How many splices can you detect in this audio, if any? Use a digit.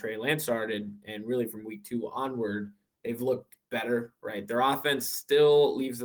0